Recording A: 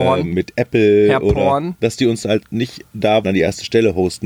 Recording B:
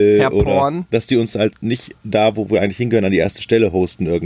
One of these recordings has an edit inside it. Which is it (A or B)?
A